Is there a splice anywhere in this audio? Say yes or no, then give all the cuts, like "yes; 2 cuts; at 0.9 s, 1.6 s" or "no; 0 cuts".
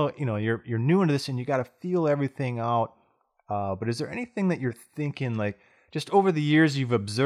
no; 0 cuts